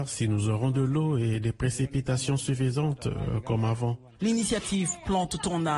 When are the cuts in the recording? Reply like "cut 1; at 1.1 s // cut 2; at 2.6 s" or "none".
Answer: none